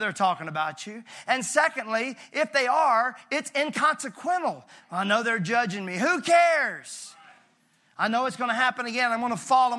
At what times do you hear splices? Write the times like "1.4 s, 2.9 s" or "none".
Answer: 4.8 s